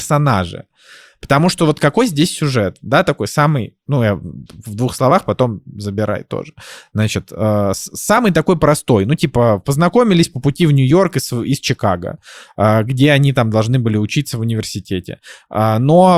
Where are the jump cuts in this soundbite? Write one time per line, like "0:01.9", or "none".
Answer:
none